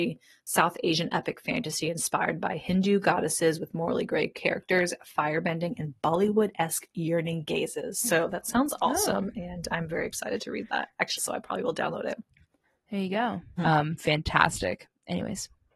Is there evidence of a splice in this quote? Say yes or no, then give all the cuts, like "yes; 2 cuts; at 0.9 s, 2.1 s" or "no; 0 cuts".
yes; 2 cuts; at 11.2 s, 13.6 s